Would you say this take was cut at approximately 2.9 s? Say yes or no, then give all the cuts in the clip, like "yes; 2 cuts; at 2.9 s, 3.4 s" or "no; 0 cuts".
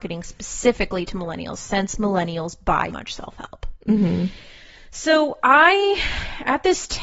yes; 1 cut; at 2.9 s